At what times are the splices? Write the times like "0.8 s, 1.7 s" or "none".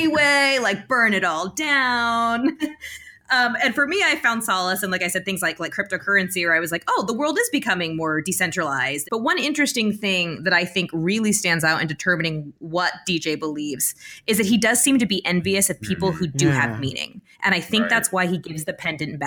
9.0 s